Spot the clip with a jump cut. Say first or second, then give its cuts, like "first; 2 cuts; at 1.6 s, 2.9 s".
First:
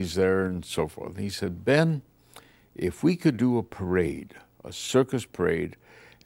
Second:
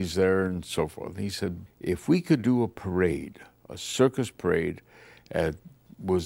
second; 1 cut; at 1.7 s